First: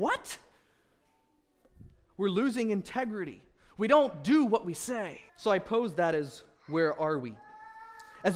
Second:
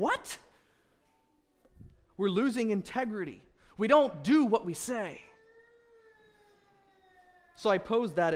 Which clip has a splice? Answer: first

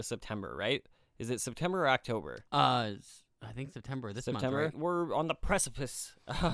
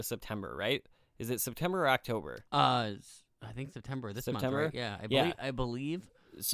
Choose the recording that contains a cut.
first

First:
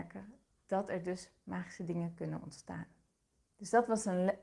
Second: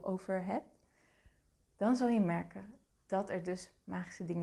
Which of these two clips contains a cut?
first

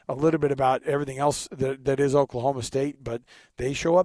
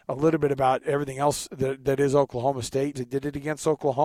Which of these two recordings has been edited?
second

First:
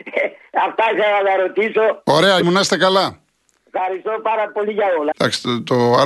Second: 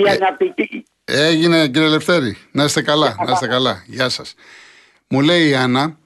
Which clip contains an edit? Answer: first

